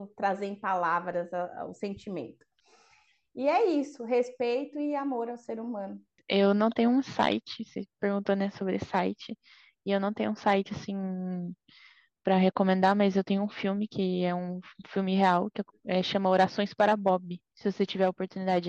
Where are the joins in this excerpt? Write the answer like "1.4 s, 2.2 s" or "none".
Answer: none